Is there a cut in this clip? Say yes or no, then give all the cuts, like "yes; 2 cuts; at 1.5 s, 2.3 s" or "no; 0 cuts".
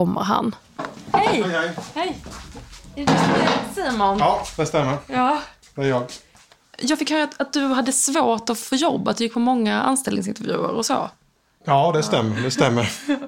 yes; 1 cut; at 8.6 s